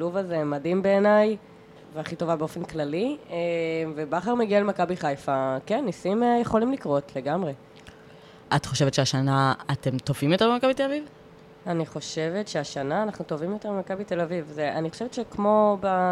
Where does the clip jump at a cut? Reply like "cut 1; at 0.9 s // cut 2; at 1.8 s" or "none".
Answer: cut 1; at 1.8 s